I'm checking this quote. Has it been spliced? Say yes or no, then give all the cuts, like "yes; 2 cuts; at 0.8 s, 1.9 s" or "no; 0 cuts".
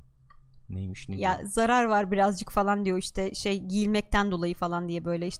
no; 0 cuts